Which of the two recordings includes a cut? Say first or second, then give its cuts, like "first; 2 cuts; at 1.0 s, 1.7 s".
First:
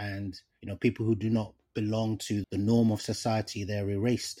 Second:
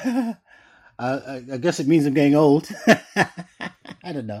first; 1 cut; at 2.4 s